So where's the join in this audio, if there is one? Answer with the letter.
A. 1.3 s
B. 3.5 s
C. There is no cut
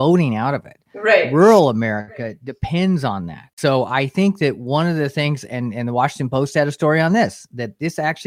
B